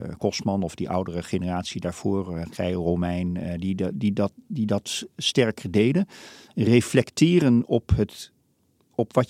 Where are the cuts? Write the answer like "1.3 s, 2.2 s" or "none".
none